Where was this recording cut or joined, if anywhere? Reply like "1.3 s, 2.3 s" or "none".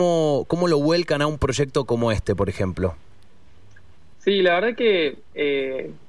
4.1 s

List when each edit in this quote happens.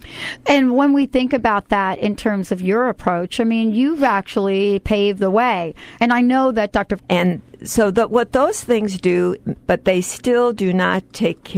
6.0 s, 7.0 s, 9.6 s

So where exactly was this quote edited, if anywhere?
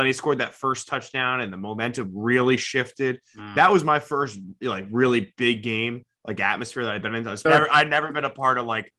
7.4 s

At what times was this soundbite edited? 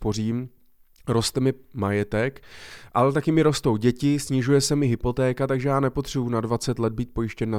none

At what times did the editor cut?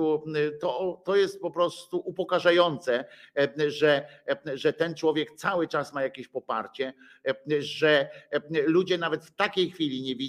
none

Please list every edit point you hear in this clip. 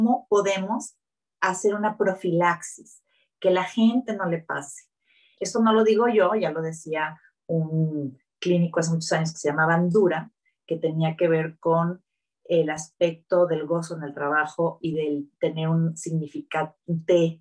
5.4 s

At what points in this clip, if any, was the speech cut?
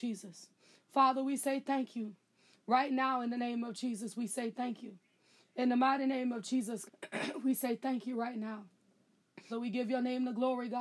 6.9 s, 9.5 s

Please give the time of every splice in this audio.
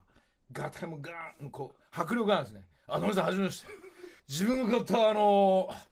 4.2 s

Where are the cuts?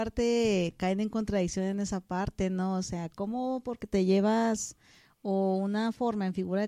none

